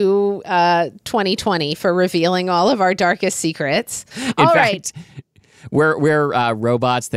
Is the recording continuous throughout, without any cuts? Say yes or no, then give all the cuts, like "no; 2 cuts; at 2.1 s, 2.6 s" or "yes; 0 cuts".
no; 1 cut; at 4.1 s